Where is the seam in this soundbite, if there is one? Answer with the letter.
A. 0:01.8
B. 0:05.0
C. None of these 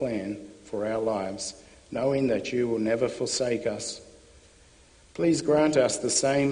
B